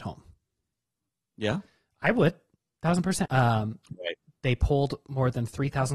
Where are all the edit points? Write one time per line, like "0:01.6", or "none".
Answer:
0:03.2